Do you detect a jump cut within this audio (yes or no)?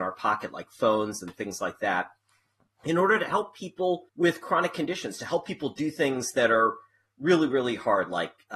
yes